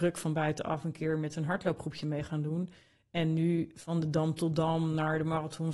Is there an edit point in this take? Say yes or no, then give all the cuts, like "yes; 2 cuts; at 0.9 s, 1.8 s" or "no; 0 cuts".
no; 0 cuts